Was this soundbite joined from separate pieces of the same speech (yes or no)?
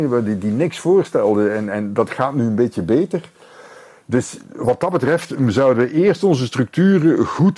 no